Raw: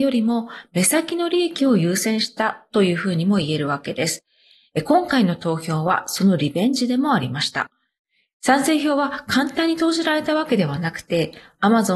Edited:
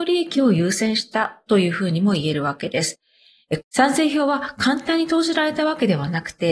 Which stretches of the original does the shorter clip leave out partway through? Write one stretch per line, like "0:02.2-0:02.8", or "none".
0:04.8-0:08.3